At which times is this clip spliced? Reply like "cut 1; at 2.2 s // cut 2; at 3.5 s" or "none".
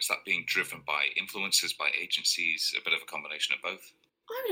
none